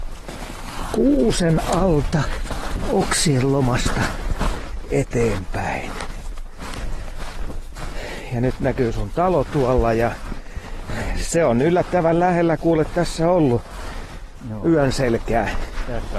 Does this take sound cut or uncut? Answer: uncut